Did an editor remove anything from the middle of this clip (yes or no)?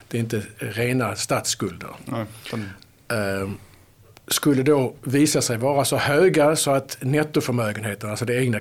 no